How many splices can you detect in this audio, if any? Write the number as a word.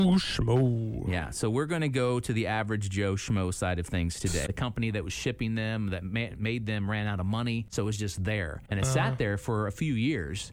one